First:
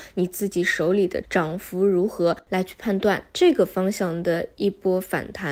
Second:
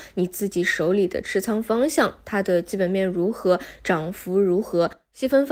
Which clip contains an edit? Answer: first; 2 cuts; at 1.2 s, 2.5 s

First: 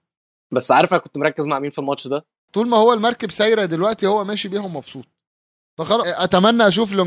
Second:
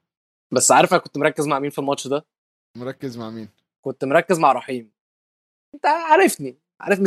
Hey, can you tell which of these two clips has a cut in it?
first; 2 cuts; at 2.5 s, 6.0 s

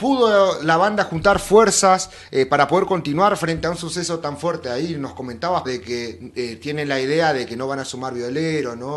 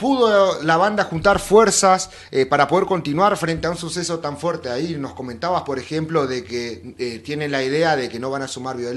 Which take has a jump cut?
first; 1 cut; at 5.6 s

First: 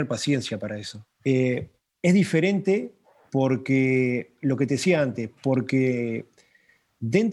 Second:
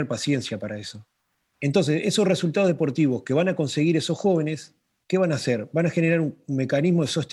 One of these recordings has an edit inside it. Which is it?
first; 2 cuts; at 1.2 s, 5.4 s

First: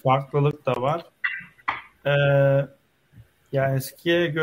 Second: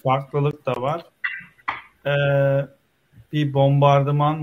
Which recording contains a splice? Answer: second; 1 cut; at 3.3 s

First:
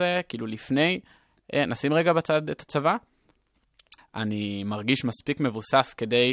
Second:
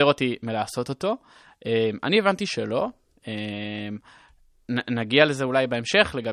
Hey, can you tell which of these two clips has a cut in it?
first; 1 cut; at 4.0 s

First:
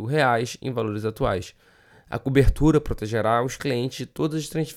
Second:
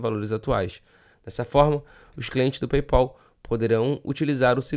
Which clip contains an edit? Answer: second; 1 cut; at 1.1 s

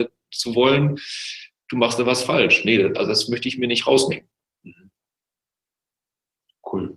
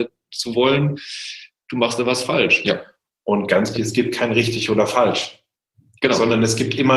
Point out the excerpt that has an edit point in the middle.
second; 2 cuts; at 2.6 s, 3.7 s

